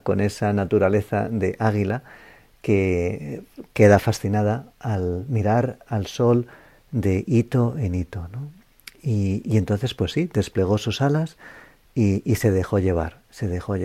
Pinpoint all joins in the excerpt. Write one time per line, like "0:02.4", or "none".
none